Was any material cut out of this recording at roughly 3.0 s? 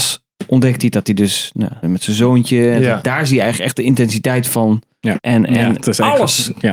yes; 3 cuts; at 1.8 s, 3.0 s, 5.2 s

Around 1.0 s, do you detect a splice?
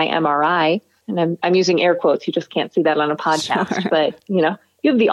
yes; 1 cut; at 1.0 s

